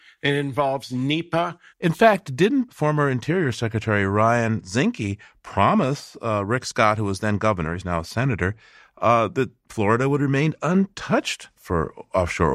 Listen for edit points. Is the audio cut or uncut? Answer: cut